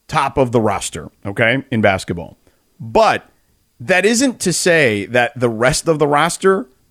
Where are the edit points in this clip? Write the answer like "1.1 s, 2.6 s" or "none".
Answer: none